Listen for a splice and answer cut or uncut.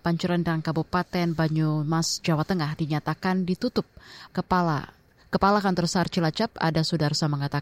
cut